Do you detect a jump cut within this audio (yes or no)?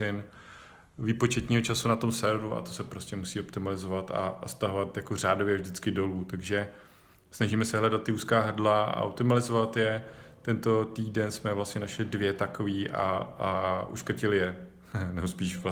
no